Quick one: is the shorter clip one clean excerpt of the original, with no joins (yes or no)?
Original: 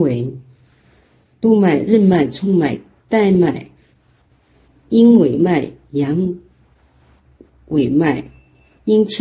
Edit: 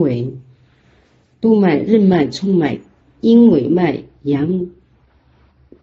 no